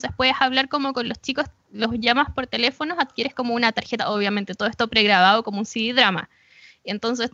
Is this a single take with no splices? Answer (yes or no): yes